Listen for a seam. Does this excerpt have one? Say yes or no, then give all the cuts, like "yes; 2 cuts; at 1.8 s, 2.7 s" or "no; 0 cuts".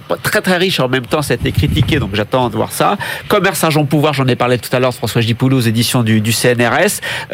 no; 0 cuts